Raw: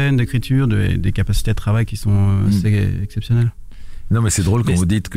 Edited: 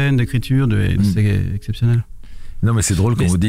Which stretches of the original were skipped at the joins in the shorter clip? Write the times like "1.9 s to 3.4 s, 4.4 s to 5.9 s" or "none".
1.0 s to 2.4 s